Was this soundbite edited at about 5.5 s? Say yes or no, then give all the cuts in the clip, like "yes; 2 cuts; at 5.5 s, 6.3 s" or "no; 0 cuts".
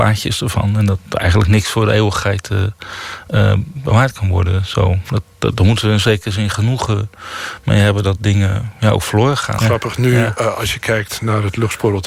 no; 1 cut; at 9.6 s